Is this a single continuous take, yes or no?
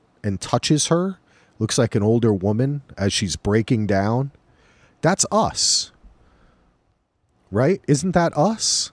yes